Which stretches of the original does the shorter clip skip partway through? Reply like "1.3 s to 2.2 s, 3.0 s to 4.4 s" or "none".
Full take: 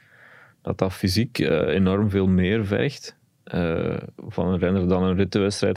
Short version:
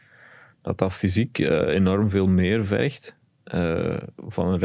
none

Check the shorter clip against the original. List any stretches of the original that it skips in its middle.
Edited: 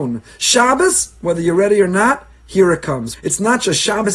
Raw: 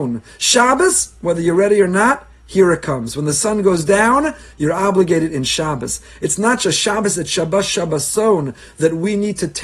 3.1 s to 6.1 s

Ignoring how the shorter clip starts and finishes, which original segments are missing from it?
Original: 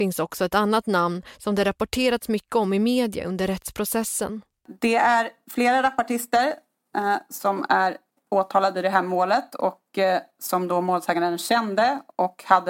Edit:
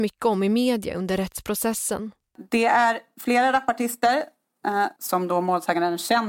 7.3 s to 10.4 s

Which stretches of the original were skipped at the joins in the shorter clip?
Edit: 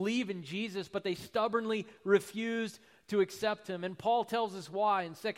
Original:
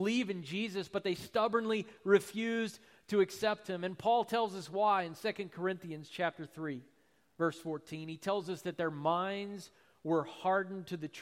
none

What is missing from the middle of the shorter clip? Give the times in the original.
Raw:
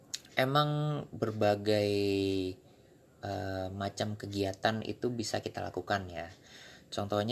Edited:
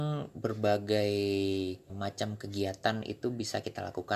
2.7 s to 3.7 s

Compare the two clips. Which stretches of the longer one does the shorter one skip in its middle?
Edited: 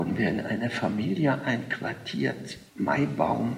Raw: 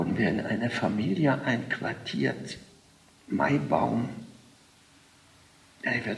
2.7 s to 3.2 s

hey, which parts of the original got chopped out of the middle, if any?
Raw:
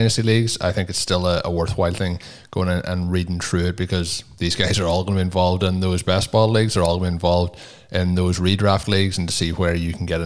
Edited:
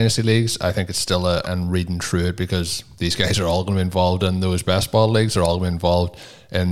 1.4 s to 2.8 s

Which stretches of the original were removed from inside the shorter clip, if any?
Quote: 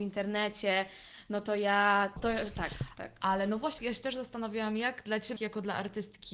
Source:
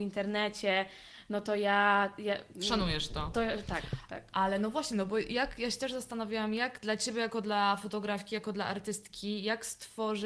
2.2 s to 3.3 s, 4.9 s to 5.6 s, 7.1 s to 8.3 s

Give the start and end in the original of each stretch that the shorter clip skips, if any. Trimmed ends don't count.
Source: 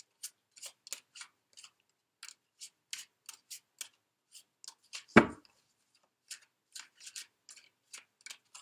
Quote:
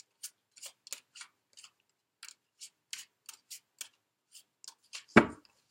none

